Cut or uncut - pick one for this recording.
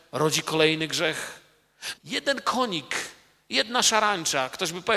cut